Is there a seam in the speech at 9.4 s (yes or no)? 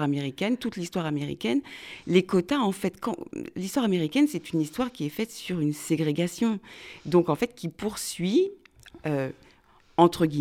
no